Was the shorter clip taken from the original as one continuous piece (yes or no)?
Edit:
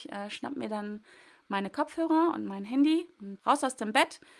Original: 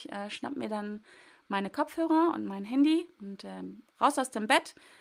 no